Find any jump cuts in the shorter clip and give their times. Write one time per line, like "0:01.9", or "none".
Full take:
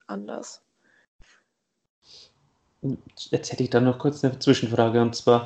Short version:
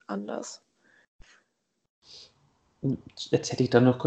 none